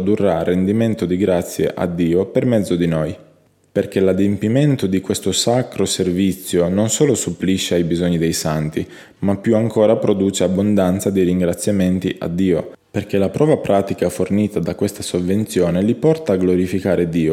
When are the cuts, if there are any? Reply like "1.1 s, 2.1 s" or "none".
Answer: none